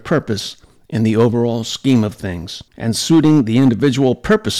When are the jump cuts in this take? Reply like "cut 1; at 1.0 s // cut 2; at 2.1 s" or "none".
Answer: cut 1; at 2.7 s